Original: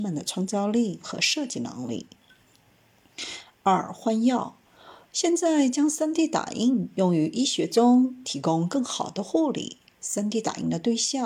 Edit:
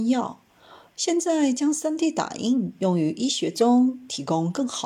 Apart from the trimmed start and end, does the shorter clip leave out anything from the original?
no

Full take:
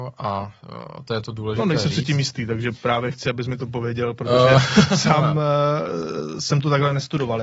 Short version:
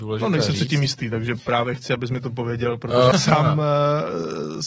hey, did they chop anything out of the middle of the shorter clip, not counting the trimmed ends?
yes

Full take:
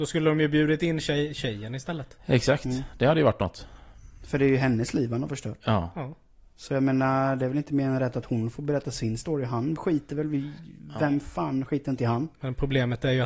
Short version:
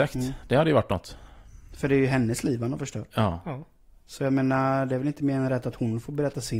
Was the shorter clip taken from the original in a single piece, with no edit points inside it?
yes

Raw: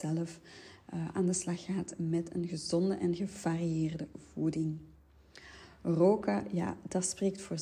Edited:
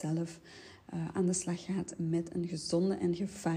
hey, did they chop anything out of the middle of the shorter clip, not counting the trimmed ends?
no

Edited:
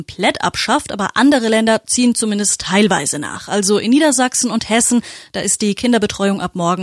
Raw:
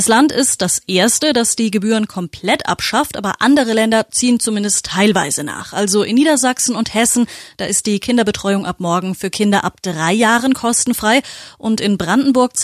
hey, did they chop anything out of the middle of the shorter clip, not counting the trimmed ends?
no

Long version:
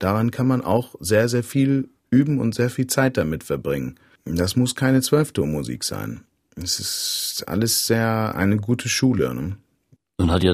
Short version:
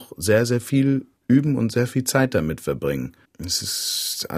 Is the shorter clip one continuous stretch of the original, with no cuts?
no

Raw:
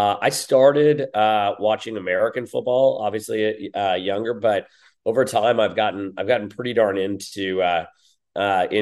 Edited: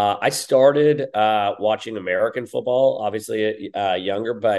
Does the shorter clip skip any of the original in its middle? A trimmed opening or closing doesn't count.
no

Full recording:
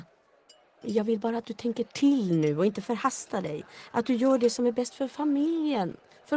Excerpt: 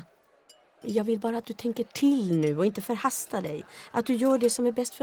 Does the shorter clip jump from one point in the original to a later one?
no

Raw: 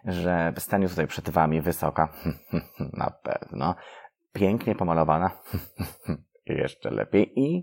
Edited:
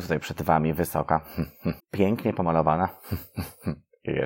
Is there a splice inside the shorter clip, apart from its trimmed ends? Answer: yes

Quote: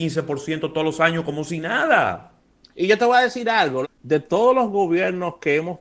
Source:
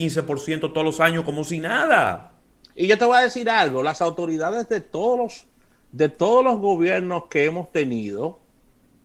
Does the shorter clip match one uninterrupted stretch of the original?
no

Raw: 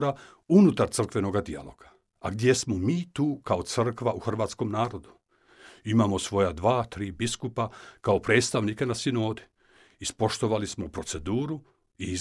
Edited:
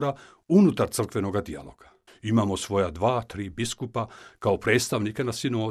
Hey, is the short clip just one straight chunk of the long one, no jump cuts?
no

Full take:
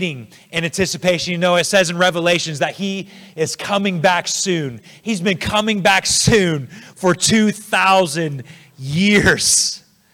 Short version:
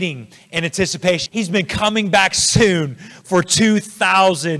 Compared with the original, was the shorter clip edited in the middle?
yes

